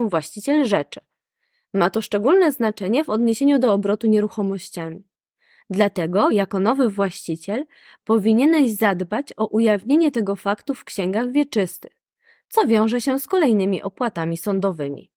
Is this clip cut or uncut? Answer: uncut